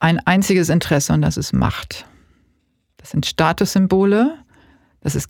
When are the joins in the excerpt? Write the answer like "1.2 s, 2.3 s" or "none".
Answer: none